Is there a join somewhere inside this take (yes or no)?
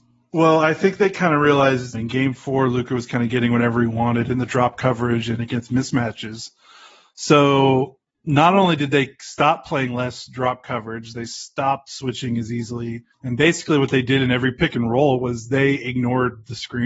yes